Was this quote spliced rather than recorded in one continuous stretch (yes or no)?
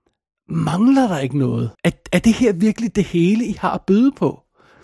yes